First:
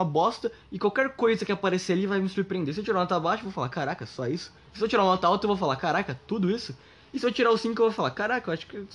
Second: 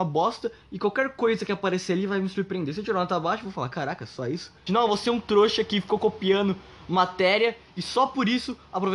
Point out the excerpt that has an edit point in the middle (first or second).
second